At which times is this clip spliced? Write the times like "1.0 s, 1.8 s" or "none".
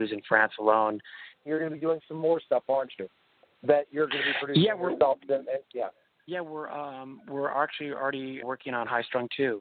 1.5 s, 6.3 s, 8.4 s